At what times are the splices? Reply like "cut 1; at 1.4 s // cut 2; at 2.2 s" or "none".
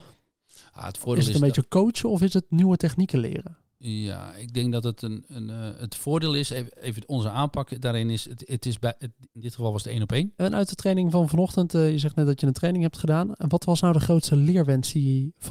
cut 1; at 10.4 s